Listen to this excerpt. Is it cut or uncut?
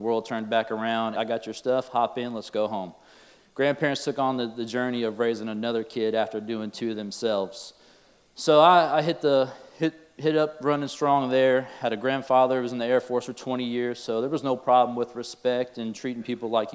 cut